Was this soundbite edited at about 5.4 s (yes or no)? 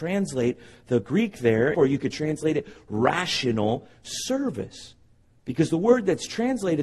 no